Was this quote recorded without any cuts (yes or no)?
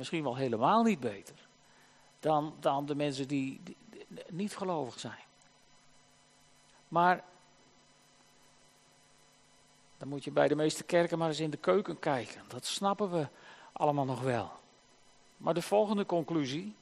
no